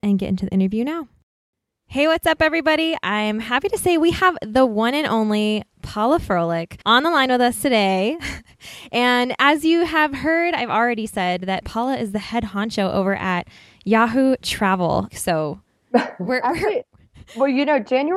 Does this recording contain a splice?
yes; 2 cuts; at 6.8 s, 15.1 s

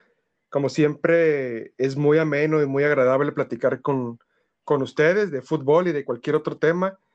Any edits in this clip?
no; 0 cuts

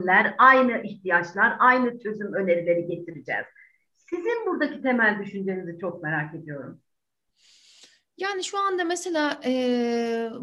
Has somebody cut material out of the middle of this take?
no; 0 cuts

